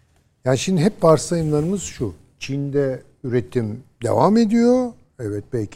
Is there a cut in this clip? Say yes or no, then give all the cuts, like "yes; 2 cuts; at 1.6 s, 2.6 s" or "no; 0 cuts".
no; 0 cuts